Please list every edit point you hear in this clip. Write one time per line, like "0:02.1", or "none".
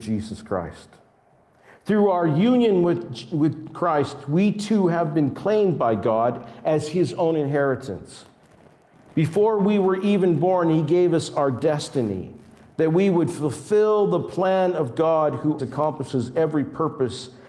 0:15.6